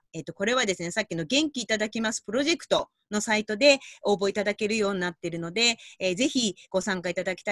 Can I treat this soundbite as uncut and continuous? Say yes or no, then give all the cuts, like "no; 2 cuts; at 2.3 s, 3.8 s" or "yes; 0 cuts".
yes; 0 cuts